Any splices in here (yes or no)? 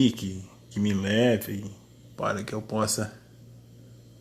yes